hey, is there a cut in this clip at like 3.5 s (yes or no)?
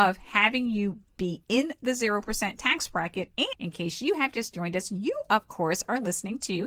yes